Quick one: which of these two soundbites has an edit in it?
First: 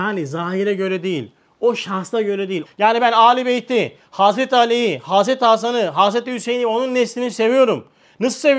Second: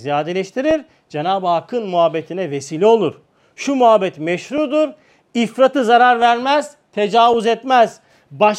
first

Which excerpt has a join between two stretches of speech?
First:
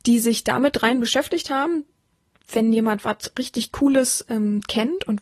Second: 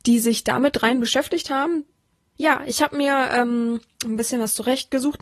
second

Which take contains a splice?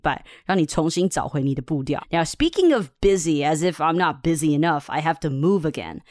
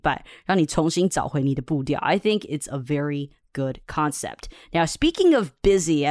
first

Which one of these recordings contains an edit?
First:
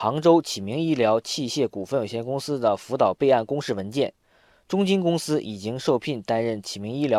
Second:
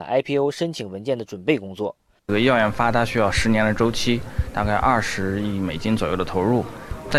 second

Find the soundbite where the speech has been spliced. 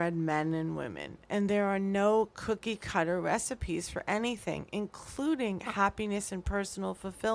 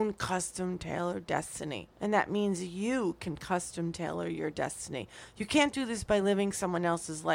second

